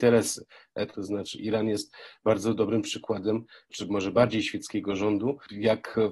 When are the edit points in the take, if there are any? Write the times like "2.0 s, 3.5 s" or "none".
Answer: 0.9 s, 3.7 s

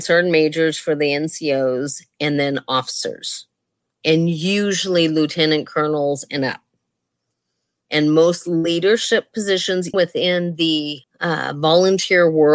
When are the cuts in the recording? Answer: 7.8 s, 9.9 s, 11.0 s

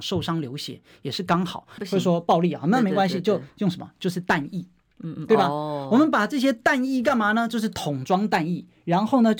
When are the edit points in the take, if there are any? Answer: 1.8 s

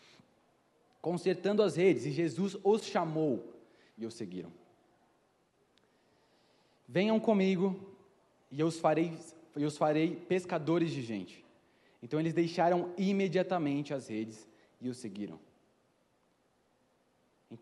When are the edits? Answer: 3.9 s

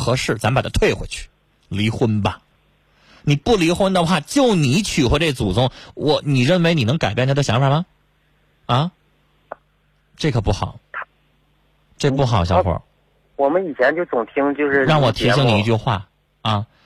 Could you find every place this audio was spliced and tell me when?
9.5 s

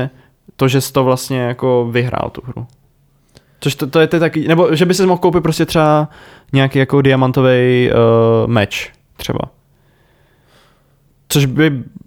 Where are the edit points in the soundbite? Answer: none

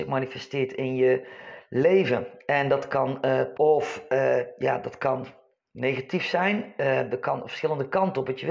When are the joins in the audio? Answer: 3.5 s

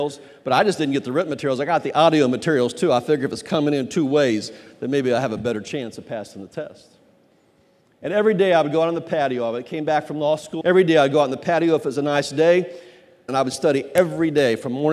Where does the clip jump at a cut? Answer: 10.6 s, 13.3 s

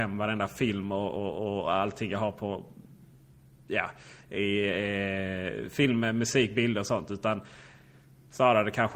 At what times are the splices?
none

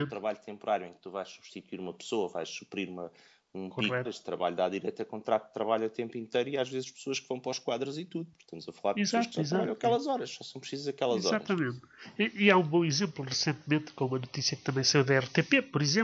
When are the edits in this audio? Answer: 4.1 s

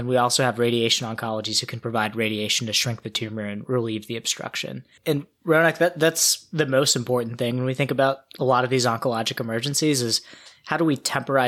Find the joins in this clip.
5.0 s

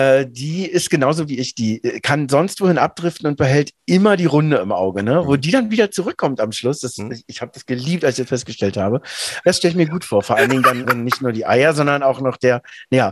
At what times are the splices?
9.4 s, 10.8 s

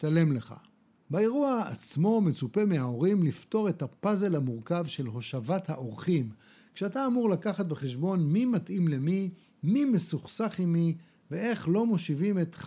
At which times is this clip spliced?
0.9 s

